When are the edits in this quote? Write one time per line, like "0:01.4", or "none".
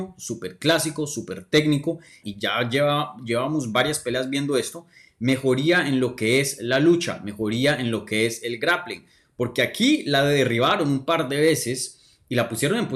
0:02.2

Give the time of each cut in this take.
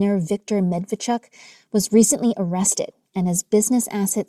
none

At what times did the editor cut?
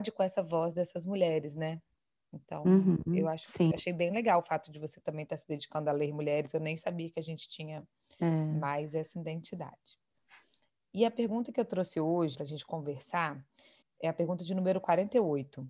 0:12.3
0:13.8

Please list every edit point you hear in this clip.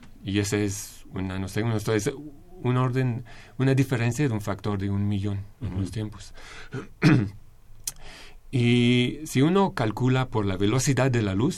none

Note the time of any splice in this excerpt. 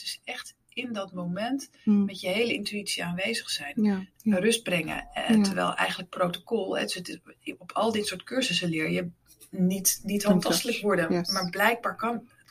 0:04.2

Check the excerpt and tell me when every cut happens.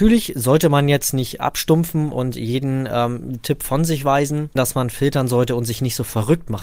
0:04.6

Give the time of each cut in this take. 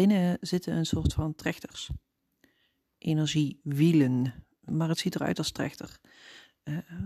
0:04.7

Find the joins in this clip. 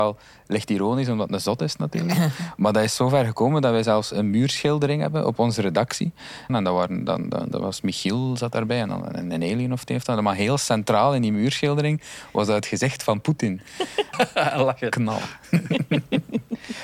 0:06.5
0:14.1

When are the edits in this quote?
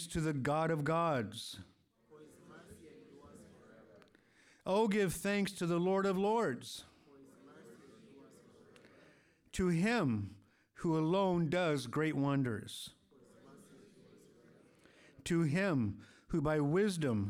none

